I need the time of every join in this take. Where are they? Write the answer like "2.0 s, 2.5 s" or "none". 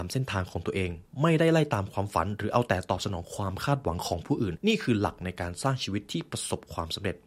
4.5 s